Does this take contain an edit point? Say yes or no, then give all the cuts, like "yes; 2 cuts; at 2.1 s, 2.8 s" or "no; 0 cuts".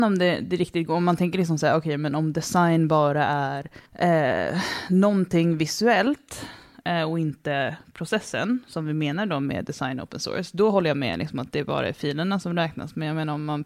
yes; 1 cut; at 3.9 s